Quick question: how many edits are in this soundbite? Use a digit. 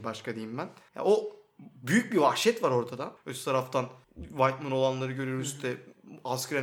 1